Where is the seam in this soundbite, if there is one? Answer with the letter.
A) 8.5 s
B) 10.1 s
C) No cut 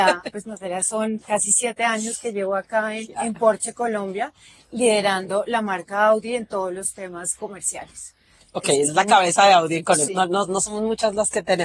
B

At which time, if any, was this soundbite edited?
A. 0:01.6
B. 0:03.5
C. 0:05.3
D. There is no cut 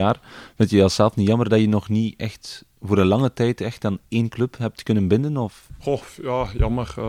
D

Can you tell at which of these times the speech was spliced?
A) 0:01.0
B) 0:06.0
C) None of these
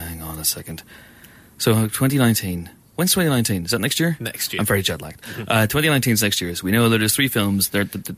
C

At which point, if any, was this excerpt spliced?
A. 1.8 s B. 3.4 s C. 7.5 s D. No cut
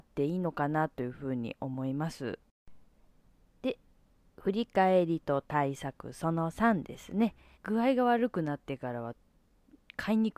C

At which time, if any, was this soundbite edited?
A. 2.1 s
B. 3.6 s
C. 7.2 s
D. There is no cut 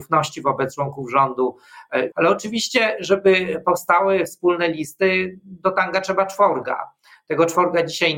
A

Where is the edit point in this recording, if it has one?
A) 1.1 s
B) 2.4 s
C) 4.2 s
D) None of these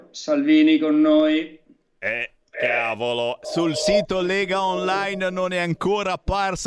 D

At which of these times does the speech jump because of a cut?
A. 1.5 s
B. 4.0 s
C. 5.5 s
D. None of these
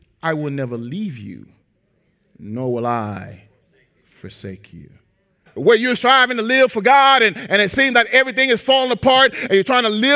C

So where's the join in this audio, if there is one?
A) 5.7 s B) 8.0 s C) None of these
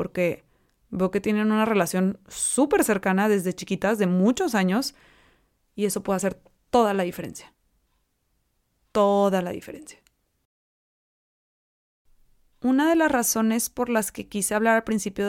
A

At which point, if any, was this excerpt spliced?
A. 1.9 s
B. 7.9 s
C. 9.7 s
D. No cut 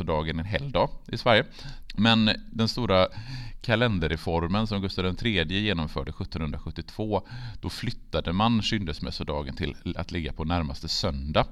A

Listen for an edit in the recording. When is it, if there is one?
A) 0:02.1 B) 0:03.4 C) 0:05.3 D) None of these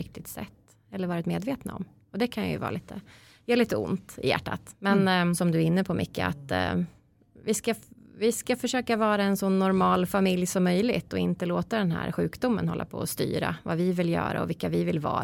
C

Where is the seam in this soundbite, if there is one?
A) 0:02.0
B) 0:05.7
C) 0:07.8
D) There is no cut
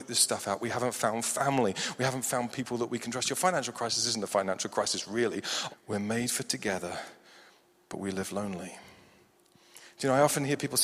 B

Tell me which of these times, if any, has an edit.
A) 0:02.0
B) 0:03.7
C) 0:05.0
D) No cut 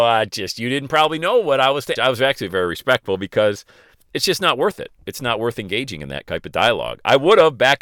A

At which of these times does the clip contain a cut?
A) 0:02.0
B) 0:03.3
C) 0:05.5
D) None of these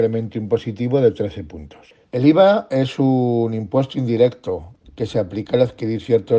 A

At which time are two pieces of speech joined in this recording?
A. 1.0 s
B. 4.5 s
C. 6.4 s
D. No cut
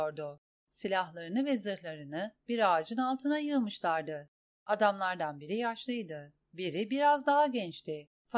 D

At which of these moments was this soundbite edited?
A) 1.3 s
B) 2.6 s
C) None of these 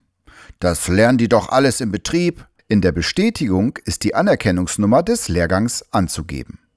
B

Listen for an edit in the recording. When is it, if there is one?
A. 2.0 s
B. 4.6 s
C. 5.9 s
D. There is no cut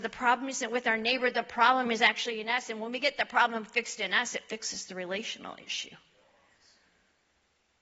D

